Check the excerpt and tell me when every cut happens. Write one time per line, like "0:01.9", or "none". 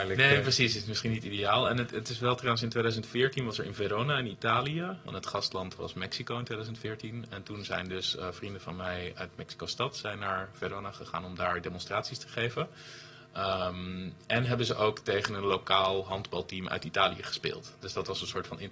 0:05.1